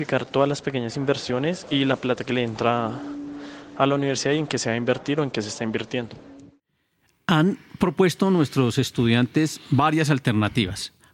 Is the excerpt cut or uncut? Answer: uncut